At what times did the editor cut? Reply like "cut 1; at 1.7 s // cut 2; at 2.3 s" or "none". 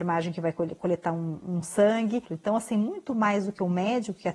cut 1; at 2.3 s